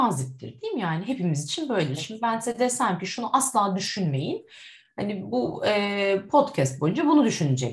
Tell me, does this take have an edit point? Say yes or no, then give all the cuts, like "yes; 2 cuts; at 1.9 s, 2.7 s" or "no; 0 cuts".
no; 0 cuts